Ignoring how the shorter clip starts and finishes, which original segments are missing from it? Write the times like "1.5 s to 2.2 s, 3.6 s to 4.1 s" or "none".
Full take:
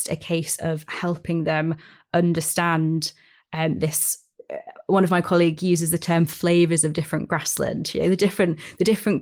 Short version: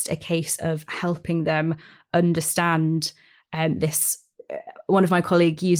none